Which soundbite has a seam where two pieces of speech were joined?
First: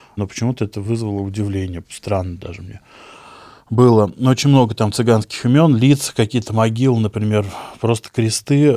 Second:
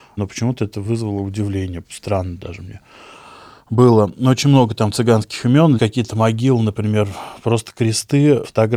second; 1 cut; at 5.8 s

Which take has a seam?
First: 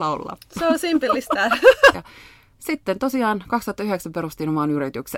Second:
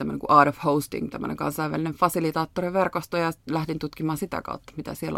first; 1 cut; at 1.9 s

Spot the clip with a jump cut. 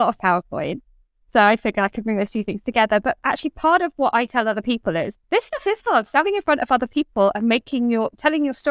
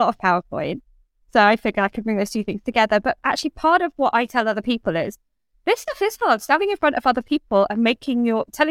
first; 1 cut; at 5.2 s

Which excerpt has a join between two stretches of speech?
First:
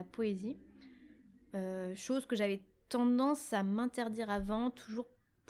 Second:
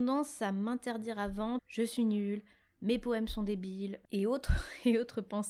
second; 1 cut; at 1.6 s

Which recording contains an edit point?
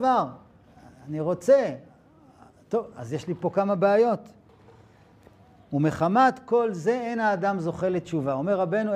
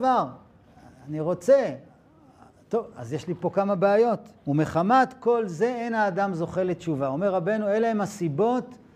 second; 1 cut; at 4.4 s

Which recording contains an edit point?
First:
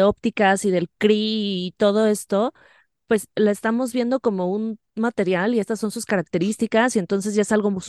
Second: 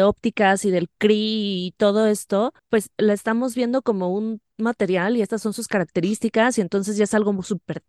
second; 1 cut; at 2.6 s

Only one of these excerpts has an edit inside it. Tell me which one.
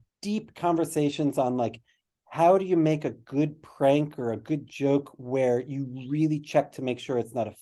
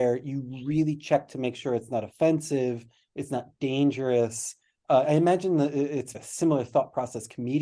second; 2 cuts; at 5.1 s, 6.1 s

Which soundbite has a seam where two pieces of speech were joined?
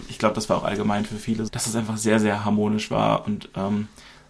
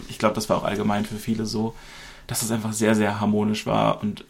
first; 1 cut; at 1.5 s

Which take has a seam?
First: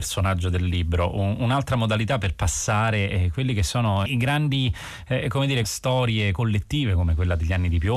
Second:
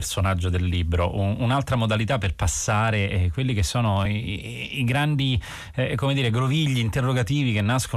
first; 2 cuts; at 4.1 s, 5.6 s

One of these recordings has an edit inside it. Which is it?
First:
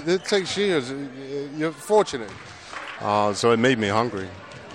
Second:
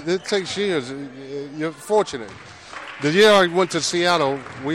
first; 1 cut; at 3.0 s

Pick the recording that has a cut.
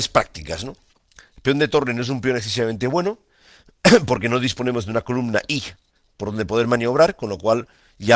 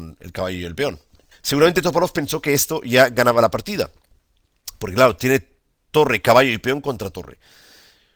second; 1 cut; at 1.3 s

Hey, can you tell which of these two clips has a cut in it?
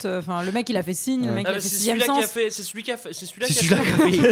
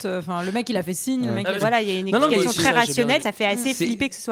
second; 2 cuts; at 1.6 s, 3.2 s

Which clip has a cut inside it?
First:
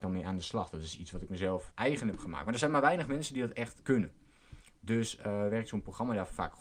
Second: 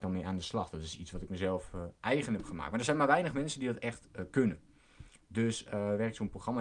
first; 2 cuts; at 1.7 s, 3.8 s

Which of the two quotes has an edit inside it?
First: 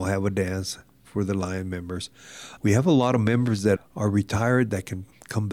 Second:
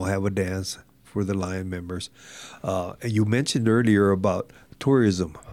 first; 2 cuts; at 2.6 s, 3.8 s

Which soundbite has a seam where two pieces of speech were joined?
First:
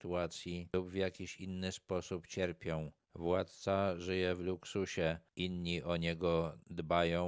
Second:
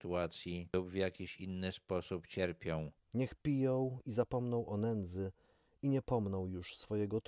second; 1 cut; at 3.0 s

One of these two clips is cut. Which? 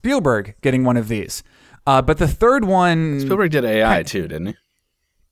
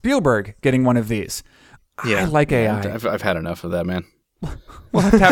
second; 1 cut; at 1.8 s

